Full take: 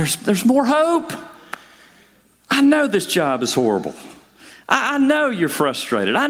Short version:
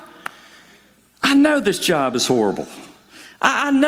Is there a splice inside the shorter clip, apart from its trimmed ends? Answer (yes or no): no